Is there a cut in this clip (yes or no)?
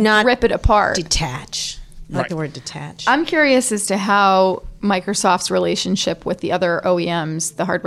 no